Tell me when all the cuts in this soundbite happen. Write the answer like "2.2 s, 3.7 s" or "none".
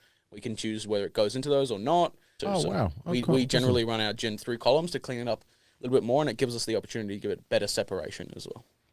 2.4 s

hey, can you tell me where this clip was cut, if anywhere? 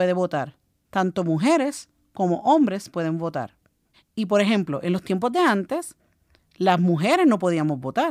3.9 s

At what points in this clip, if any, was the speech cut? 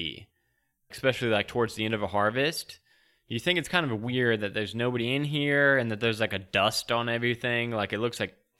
0.9 s

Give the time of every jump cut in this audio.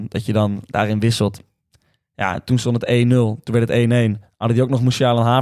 none

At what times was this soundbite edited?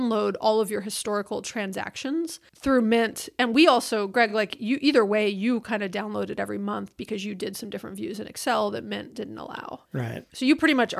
none

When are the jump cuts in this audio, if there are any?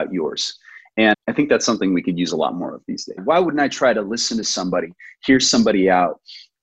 1.1 s, 3.2 s

